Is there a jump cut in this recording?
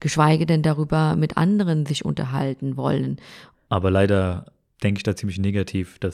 yes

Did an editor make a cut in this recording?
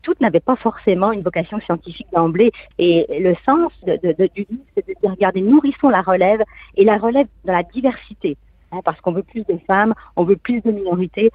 yes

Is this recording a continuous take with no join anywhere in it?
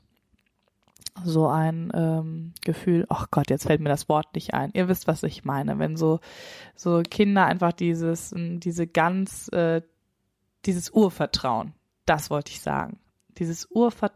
yes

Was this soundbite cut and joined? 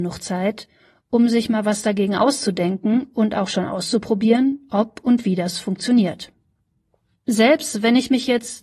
no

